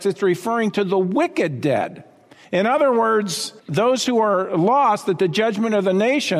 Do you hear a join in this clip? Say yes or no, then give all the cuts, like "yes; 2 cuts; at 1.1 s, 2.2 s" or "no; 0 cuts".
yes; 1 cut; at 3.6 s